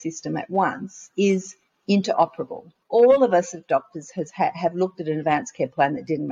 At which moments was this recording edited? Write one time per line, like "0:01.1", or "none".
0:02.8